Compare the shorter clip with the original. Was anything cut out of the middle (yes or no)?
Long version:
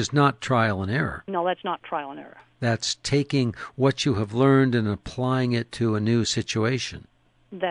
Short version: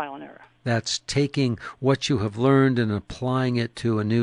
no